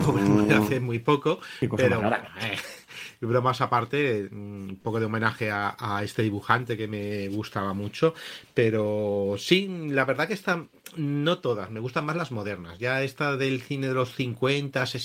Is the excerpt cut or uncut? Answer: uncut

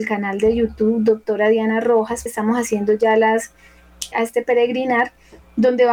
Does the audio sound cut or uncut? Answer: cut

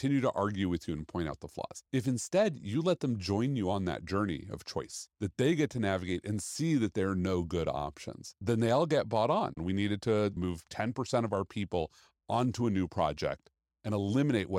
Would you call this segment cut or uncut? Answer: cut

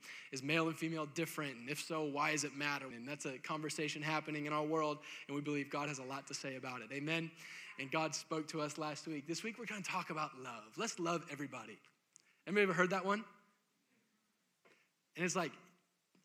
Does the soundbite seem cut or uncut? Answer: cut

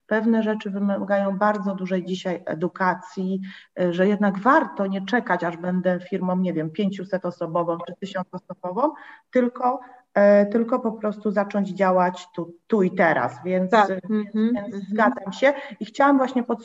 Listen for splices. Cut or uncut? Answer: uncut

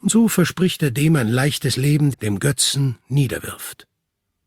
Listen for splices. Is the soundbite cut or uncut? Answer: cut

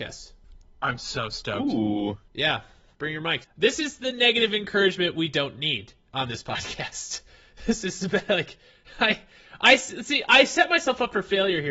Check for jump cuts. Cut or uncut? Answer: cut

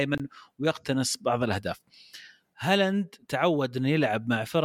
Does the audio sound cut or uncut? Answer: cut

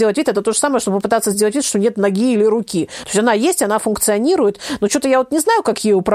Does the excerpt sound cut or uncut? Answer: uncut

